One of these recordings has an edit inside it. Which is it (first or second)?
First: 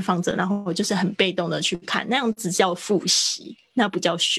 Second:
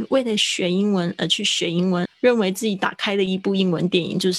second